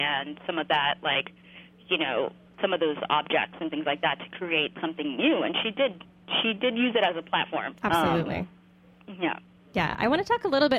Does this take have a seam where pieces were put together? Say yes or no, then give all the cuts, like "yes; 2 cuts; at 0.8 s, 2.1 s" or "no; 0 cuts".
yes; 1 cut; at 7.8 s